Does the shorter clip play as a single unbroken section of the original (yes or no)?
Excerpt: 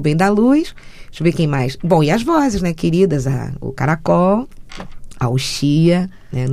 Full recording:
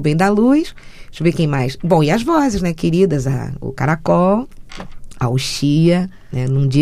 yes